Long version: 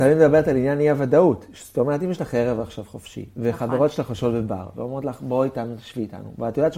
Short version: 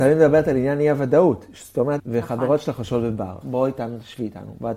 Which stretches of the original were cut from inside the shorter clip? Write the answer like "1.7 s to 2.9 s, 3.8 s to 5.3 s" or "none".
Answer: 2.0 s to 3.3 s, 4.7 s to 5.2 s